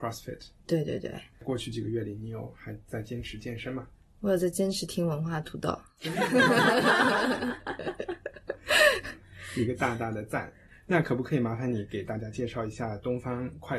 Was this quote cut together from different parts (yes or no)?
no